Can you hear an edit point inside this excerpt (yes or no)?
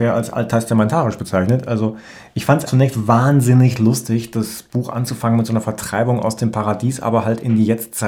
yes